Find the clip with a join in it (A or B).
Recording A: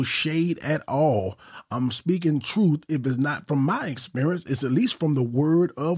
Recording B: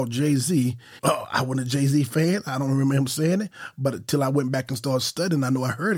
B